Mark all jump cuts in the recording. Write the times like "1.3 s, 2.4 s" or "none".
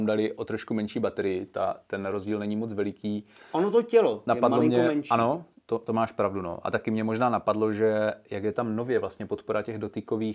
none